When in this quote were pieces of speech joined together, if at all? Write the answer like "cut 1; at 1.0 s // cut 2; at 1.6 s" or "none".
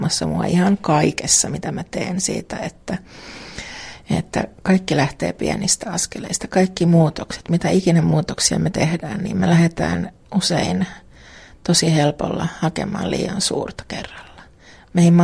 none